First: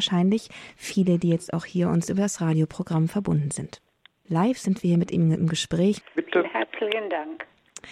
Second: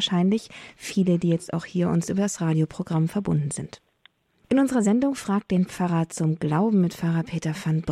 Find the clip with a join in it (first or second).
first